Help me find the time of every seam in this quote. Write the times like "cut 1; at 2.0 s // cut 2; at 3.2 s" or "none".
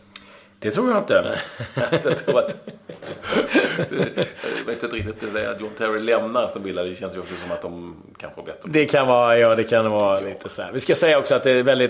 none